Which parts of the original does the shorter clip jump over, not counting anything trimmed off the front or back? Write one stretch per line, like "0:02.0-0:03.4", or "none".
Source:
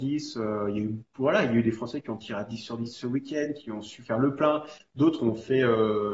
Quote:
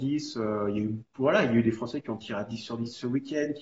none